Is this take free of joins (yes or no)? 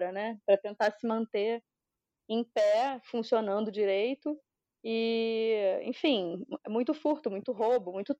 yes